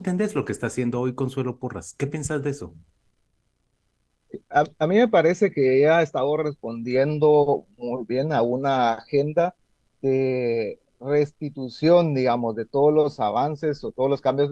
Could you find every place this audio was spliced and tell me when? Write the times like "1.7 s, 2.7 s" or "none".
none

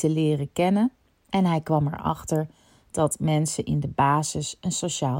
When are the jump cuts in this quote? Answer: none

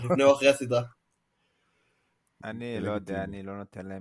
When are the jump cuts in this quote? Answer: 2.4 s

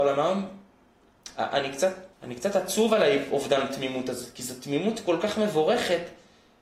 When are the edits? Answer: 2.1 s

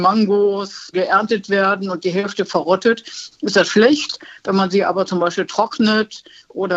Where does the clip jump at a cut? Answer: none

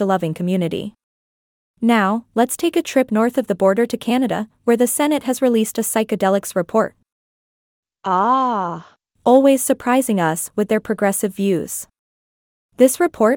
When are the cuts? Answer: 9.2 s

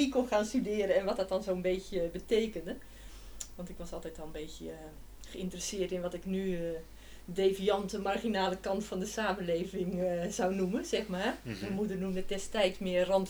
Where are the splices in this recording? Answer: none

